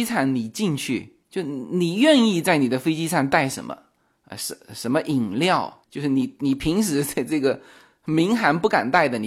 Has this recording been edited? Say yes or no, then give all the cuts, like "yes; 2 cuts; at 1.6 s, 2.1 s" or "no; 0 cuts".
yes; 2 cuts; at 4.3 s, 5.8 s